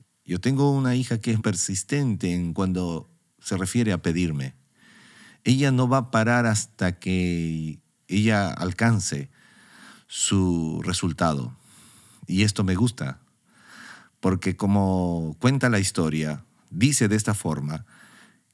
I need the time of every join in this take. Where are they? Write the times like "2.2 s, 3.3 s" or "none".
1.4 s